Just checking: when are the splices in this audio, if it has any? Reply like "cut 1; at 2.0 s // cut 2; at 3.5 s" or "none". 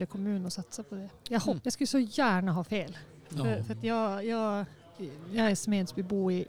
cut 1; at 1.6 s